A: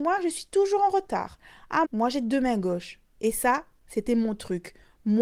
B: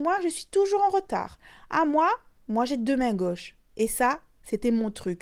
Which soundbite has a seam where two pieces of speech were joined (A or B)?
A